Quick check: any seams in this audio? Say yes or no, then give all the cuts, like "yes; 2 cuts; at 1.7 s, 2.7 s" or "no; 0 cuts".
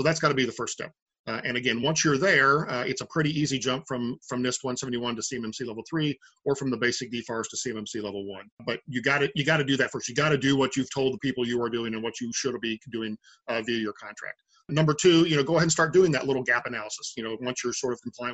no; 0 cuts